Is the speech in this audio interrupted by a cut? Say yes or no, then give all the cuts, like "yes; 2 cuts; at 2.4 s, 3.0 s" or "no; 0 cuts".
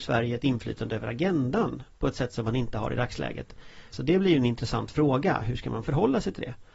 yes; 1 cut; at 3.9 s